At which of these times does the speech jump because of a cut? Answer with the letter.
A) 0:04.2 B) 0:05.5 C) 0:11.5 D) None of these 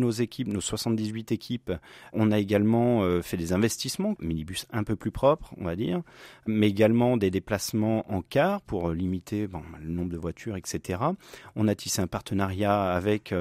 A